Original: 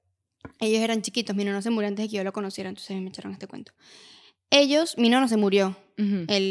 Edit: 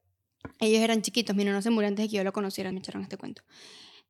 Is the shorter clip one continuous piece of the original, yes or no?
no